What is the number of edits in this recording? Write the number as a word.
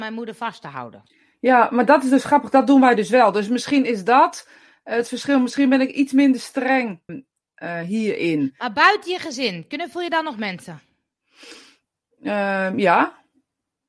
one